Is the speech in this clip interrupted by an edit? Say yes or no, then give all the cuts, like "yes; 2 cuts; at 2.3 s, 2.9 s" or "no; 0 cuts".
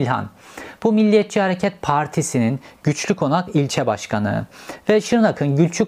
no; 0 cuts